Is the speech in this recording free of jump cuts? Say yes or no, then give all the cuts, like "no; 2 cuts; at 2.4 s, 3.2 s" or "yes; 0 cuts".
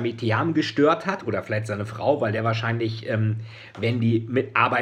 yes; 0 cuts